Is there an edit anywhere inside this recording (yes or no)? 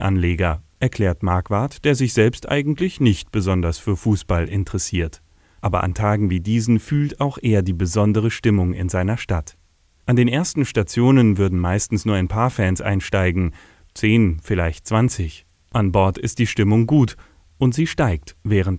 no